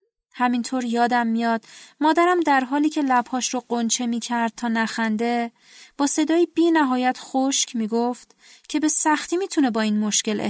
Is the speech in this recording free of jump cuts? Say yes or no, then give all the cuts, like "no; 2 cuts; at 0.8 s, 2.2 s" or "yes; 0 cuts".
yes; 0 cuts